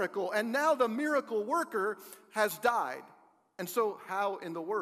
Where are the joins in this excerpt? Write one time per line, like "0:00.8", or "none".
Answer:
none